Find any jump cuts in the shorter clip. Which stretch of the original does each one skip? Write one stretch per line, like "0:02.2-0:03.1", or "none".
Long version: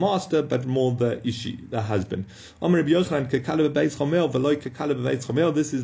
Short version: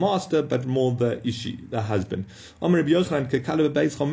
none